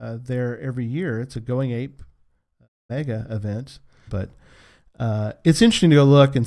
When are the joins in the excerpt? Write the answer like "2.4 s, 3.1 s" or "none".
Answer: 4.1 s